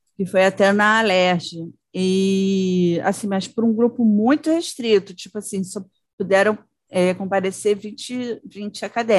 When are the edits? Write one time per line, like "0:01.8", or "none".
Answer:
none

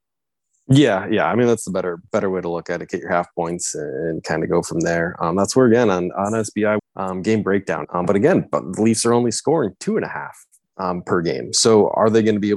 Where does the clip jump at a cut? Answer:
0:06.8
0:07.8

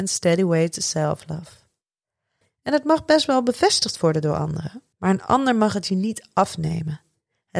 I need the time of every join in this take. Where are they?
0:02.4
0:04.9

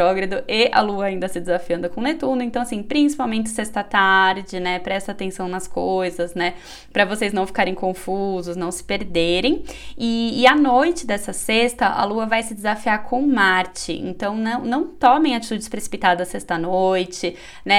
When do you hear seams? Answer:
none

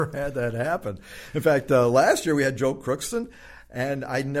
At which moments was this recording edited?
none

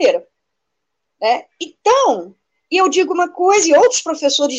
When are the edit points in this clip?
none

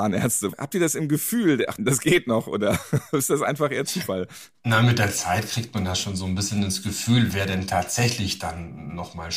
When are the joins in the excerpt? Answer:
0:01.8

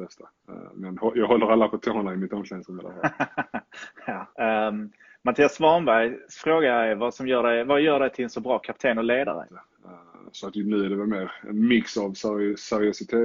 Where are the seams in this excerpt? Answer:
0:04.3
0:09.5

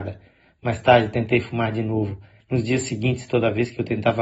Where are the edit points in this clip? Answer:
0:02.4

